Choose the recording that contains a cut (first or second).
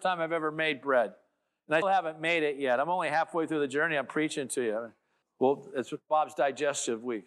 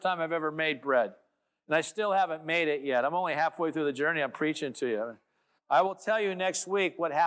first